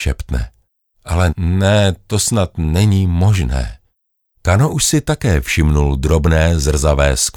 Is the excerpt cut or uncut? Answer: cut